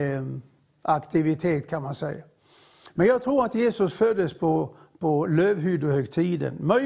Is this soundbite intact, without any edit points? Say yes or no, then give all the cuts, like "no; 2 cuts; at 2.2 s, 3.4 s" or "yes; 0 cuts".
yes; 0 cuts